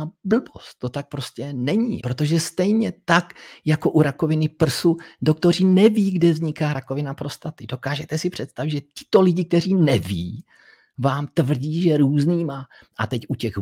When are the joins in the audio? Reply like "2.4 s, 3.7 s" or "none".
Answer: 2.0 s